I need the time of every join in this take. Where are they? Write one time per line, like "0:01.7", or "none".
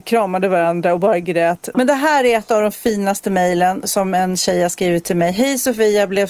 0:01.7

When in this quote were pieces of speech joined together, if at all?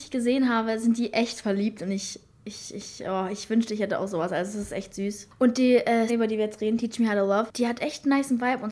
0:06.1

